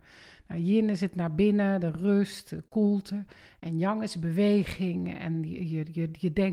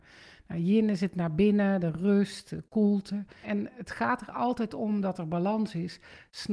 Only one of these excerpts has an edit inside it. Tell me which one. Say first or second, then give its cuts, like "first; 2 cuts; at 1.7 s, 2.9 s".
second; 1 cut; at 3.4 s